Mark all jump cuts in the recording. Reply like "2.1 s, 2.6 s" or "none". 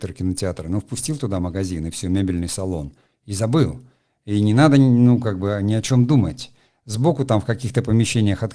none